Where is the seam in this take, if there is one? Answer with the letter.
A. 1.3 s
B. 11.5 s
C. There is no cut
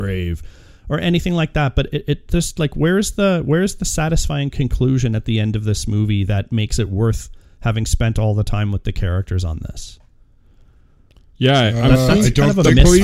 C